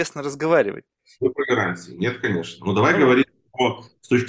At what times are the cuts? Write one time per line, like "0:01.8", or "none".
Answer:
0:01.2